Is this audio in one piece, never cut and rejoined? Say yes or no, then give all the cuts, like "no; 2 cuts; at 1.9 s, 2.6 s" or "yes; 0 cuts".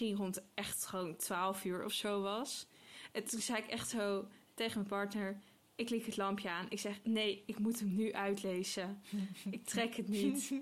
yes; 0 cuts